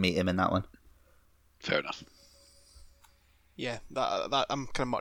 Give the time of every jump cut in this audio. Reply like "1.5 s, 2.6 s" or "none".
none